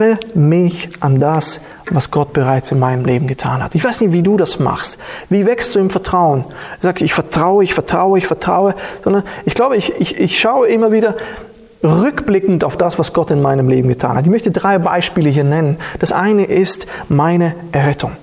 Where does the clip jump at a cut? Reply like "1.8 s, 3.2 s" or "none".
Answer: none